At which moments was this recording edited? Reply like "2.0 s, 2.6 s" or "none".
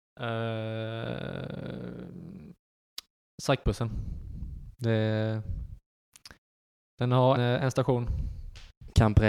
7.4 s